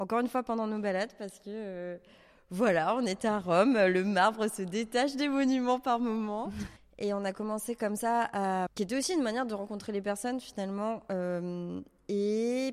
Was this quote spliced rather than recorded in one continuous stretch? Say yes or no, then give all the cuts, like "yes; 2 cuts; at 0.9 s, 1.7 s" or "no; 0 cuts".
yes; 2 cuts; at 6.8 s, 8.7 s